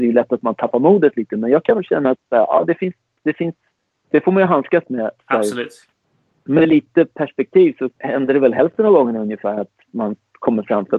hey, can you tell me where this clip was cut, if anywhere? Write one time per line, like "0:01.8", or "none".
0:05.2
0:07.9